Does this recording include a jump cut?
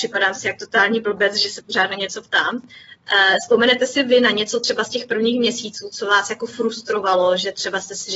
no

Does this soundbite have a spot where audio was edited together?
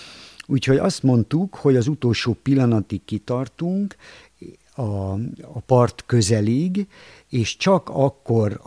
no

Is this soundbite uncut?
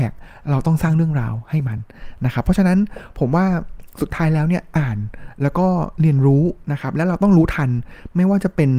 yes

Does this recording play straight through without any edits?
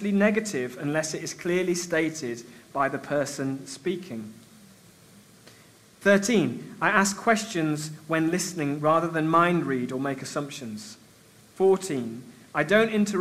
yes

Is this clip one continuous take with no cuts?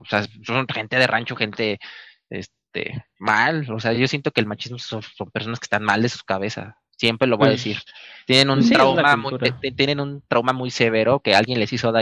yes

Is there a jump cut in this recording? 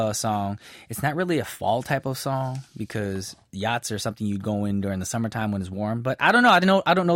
no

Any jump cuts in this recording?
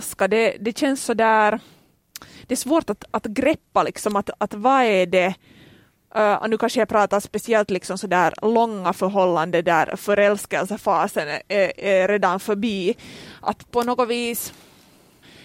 no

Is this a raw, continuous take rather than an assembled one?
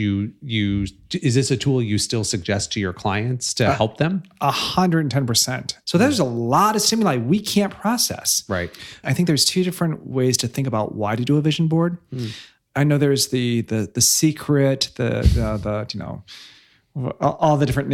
no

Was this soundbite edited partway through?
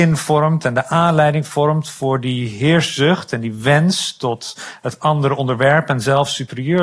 no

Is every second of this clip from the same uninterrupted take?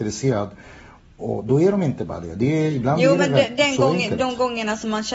yes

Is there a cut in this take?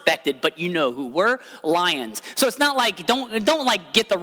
no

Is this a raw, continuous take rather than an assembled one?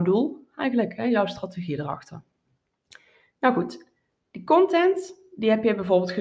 yes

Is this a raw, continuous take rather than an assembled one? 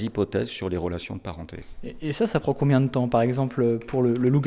yes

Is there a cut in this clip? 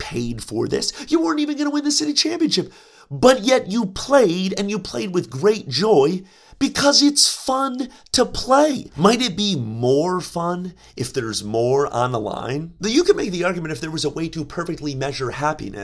yes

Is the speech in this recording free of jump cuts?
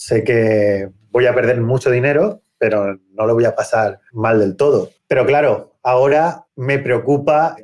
yes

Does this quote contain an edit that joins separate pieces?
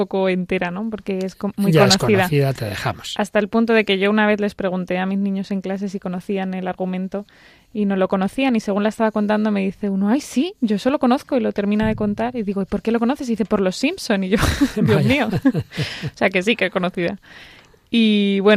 no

